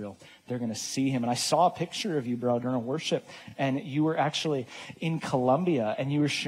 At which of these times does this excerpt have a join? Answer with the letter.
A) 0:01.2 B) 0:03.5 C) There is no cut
C